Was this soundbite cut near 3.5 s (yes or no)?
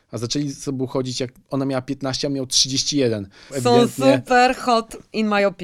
yes